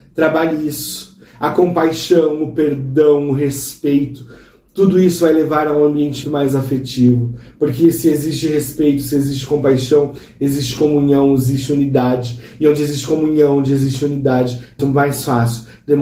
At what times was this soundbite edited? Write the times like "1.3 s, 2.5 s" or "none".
6.2 s, 14.8 s